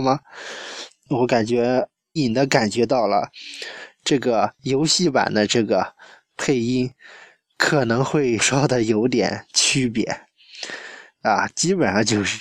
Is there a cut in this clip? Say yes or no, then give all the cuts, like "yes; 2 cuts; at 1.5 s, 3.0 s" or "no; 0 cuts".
yes; 2 cuts; at 2.2 s, 8.4 s